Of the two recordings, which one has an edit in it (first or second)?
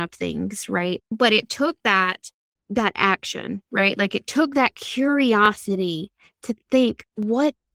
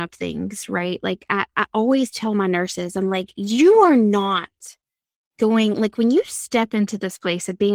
first